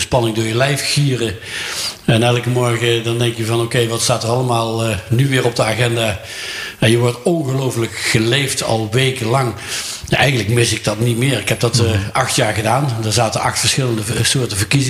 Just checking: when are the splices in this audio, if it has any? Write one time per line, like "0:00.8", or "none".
none